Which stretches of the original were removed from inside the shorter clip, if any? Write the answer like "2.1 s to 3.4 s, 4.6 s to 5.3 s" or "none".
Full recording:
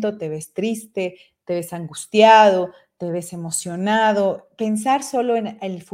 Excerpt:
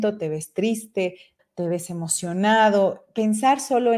1.4 s to 2.8 s